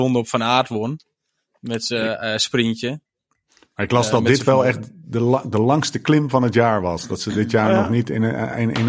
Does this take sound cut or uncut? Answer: uncut